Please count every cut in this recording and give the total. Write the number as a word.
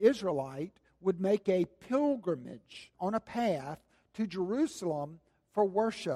one